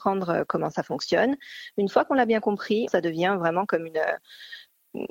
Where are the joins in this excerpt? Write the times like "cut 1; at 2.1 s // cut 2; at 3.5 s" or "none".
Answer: cut 1; at 2.9 s